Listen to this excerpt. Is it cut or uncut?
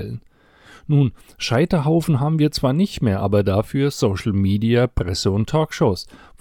uncut